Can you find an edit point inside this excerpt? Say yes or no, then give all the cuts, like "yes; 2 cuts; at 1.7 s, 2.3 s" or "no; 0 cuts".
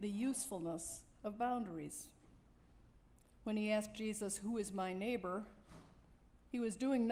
no; 0 cuts